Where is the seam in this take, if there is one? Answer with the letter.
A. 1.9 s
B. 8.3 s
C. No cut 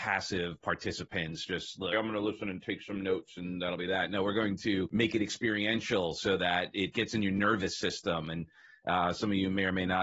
A